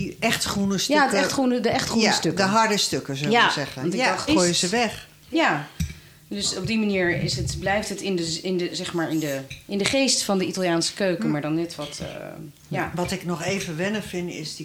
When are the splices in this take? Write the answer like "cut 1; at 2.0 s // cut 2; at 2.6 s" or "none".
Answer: cut 1; at 4.3 s